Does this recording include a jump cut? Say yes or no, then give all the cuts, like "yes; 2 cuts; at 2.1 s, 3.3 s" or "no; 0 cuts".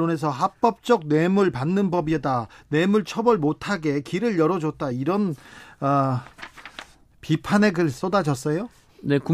no; 0 cuts